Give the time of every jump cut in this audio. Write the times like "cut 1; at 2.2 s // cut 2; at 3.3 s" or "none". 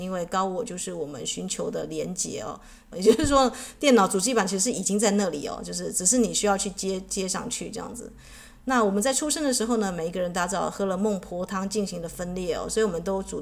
cut 1; at 2.9 s